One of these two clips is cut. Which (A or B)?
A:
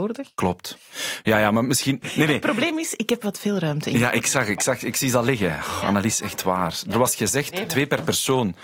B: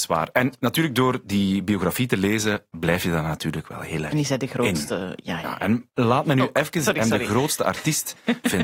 A